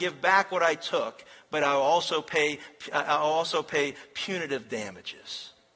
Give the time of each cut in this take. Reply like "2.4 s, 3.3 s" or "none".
none